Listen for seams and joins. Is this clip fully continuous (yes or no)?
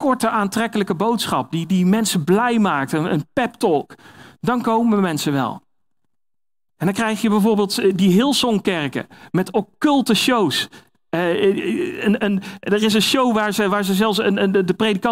yes